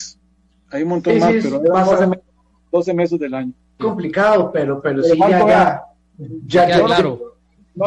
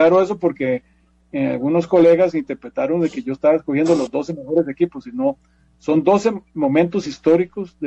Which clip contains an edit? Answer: first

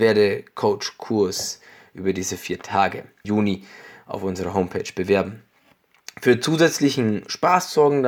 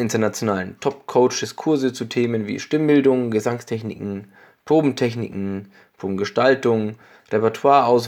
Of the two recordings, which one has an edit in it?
first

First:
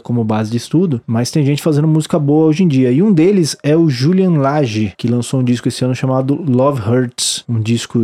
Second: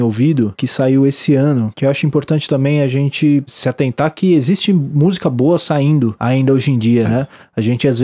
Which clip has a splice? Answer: second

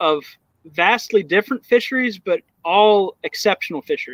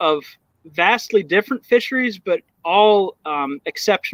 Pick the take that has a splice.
first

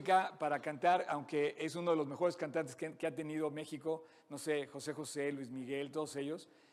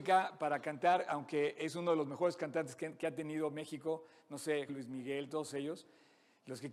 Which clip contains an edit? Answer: second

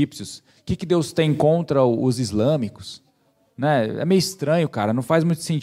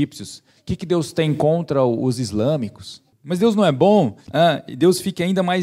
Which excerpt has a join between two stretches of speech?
second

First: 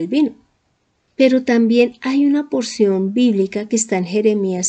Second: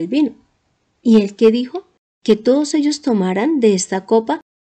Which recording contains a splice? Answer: second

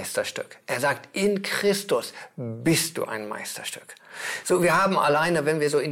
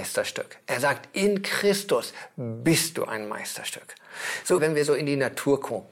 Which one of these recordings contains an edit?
second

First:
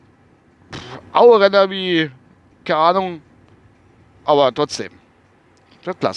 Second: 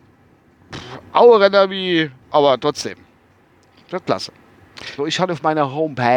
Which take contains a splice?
second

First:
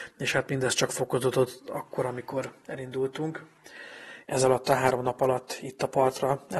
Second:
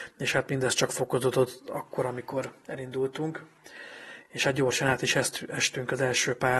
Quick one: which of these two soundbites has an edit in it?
first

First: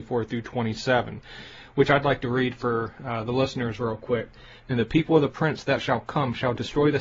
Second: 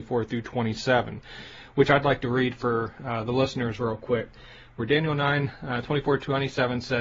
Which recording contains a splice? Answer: first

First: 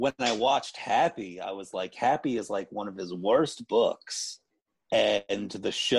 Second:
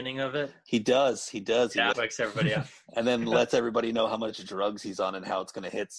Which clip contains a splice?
second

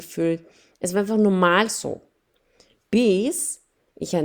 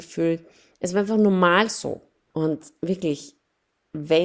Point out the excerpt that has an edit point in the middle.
second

